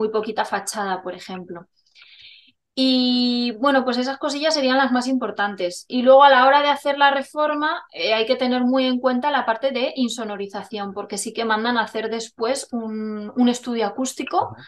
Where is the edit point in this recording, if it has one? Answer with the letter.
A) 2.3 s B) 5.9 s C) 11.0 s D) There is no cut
D